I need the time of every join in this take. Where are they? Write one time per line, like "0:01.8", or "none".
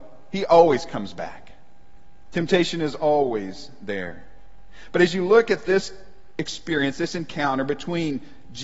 none

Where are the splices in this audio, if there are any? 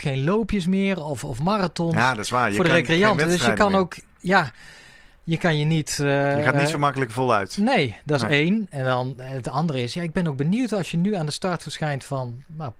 none

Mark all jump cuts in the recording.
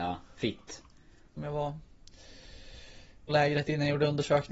0:01.4
0:03.3

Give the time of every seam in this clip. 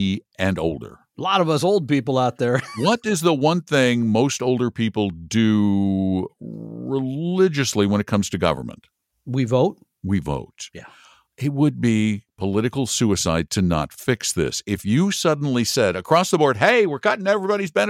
none

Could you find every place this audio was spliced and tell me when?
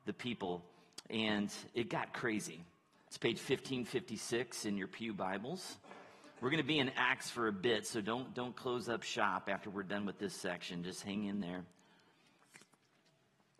0:03.1

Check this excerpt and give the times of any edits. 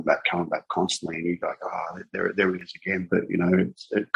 0:03.1

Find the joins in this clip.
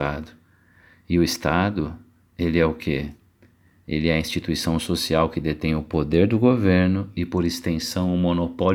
none

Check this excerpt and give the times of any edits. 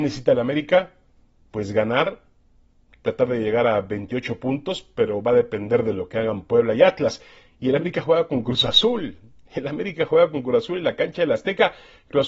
none

